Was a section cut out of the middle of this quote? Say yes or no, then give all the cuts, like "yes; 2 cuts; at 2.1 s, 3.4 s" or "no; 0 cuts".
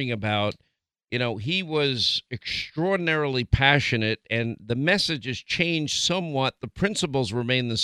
no; 0 cuts